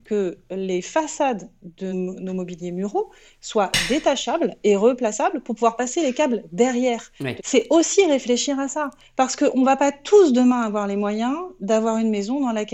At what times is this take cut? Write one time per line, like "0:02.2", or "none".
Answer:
0:01.9
0:07.4